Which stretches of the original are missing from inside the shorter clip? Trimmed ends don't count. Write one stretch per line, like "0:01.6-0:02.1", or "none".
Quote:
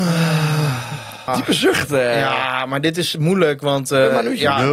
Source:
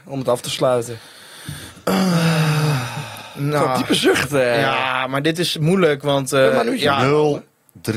0:03.3-0:03.7

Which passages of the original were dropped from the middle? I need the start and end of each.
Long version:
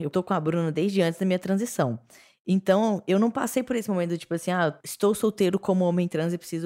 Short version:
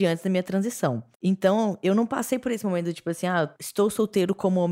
0:02.1-0:02.4

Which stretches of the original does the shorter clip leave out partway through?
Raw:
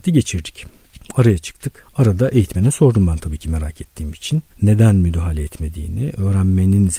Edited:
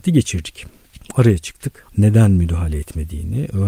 0:01.9-0:04.5

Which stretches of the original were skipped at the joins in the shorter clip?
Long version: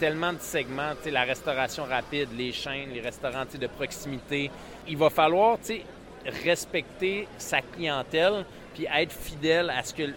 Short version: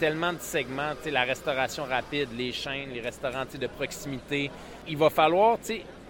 none

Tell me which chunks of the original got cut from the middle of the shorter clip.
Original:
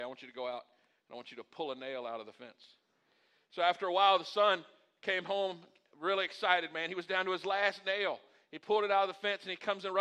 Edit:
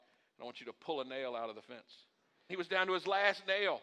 0:03.2-0:06.9

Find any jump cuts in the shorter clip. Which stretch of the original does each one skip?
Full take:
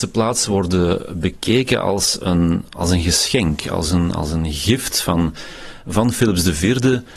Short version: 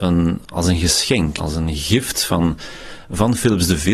0:03.6-0:04.1

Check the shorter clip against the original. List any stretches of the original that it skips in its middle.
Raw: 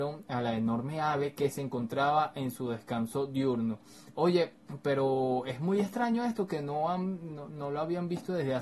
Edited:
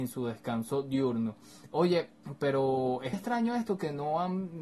0:05.6-0:05.8

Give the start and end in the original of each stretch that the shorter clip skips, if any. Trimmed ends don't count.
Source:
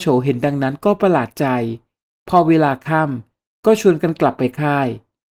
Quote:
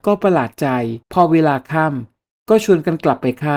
0:01.8-0:02.2

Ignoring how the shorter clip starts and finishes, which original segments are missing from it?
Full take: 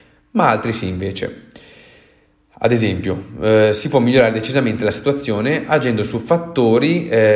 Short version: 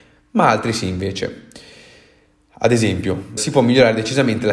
0:03.4-0:03.8

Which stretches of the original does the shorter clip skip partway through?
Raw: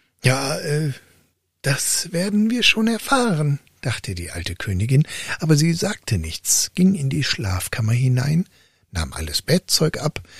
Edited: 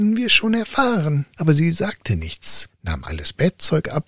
0:03.7-0:05.4
0:06.7-0:08.8

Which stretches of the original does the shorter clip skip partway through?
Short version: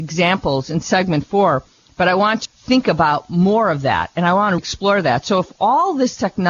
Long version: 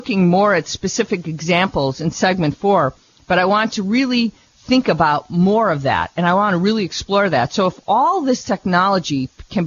0:03.8-0:04.5
0:06.6-0:06.9

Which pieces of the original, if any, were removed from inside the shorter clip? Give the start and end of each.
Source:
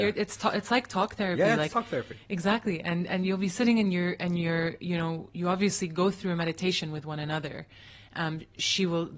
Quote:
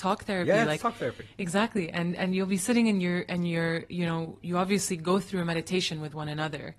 none

